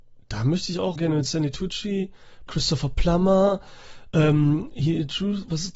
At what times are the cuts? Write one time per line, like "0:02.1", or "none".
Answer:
0:01.0
0:02.5